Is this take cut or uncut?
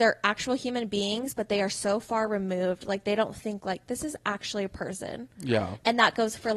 uncut